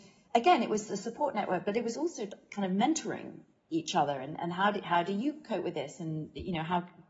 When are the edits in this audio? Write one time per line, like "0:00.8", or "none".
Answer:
none